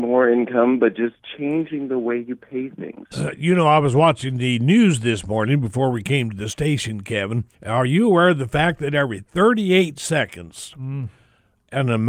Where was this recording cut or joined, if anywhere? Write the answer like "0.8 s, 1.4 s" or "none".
3.1 s, 7.5 s